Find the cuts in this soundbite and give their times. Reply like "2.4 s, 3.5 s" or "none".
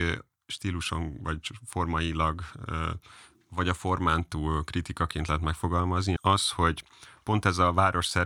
6.2 s